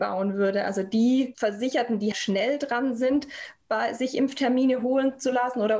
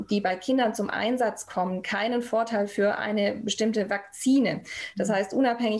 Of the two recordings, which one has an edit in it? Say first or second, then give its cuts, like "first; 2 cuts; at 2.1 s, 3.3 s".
first; 1 cut; at 2.1 s